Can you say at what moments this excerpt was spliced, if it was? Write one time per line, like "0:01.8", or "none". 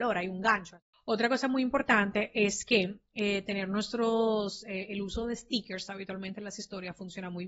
0:00.9